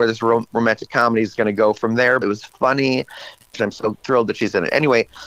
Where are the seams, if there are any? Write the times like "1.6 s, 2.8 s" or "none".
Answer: 2.2 s, 3.5 s